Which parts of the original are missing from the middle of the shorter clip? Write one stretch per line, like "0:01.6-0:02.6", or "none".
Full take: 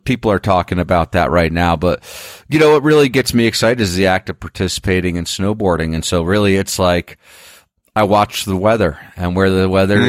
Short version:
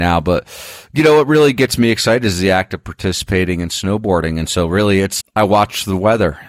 0:06.8-0:07.8